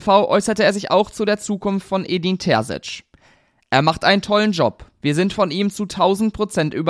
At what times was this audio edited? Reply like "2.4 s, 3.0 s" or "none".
none